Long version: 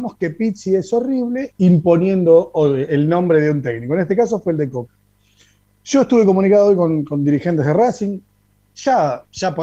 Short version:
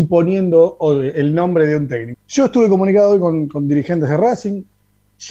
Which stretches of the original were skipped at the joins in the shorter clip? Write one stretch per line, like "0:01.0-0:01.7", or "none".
0:03.9-0:05.7